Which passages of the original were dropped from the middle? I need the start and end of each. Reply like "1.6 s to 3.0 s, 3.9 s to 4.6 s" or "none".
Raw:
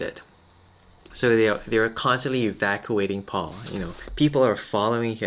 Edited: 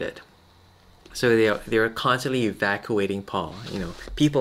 none